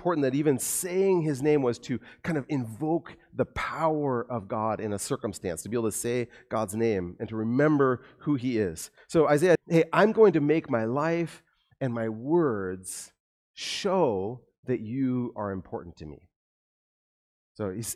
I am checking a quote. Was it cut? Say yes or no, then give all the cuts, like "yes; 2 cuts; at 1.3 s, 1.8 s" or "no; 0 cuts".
yes; 1 cut; at 9.6 s